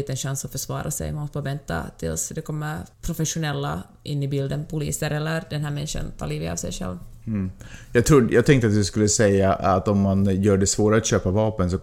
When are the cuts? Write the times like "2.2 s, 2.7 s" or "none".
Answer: 2.9 s